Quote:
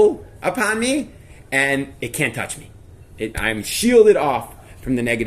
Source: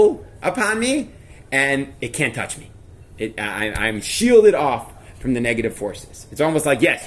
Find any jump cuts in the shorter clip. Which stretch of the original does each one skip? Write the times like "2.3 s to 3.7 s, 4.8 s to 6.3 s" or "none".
3.3 s to 3.7 s